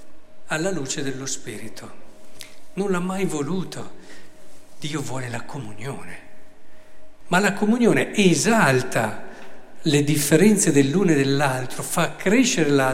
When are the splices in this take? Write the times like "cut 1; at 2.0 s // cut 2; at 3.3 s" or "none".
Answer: cut 1; at 2.8 s // cut 2; at 7.2 s